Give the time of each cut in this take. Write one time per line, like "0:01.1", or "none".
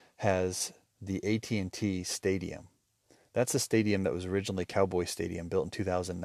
none